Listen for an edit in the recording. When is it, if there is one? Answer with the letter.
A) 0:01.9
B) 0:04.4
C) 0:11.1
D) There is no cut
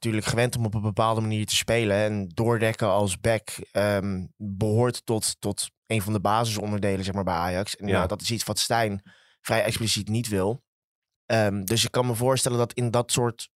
C